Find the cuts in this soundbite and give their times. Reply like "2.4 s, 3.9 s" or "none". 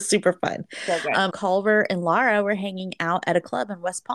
1.3 s